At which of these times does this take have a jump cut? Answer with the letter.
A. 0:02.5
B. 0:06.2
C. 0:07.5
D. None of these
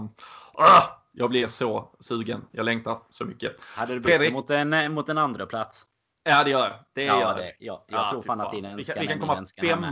D